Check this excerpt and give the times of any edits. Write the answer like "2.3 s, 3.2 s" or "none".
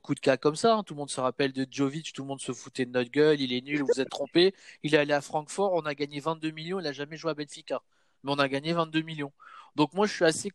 none